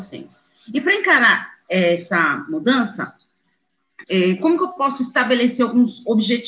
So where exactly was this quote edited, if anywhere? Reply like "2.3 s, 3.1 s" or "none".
4.0 s